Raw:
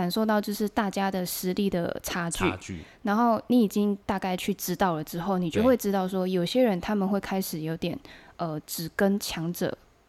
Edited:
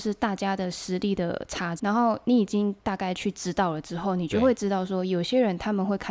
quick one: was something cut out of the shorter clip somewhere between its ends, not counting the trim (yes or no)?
yes